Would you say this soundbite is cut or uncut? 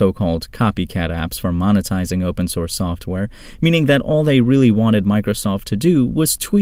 uncut